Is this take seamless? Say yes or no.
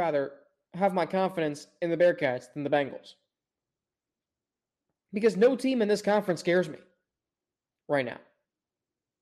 yes